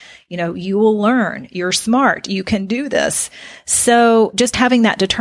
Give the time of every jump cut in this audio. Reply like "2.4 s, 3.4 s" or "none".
none